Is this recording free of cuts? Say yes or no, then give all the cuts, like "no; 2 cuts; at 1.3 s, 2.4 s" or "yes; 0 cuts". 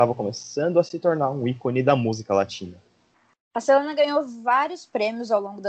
yes; 0 cuts